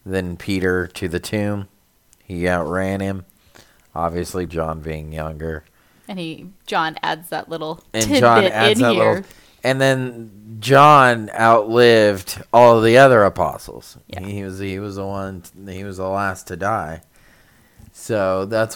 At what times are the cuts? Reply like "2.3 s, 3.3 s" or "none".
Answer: 4.5 s